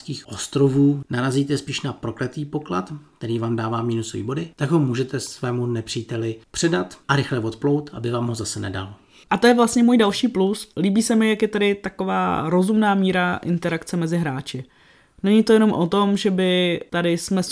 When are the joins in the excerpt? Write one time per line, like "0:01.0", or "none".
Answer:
0:01.0
0:04.5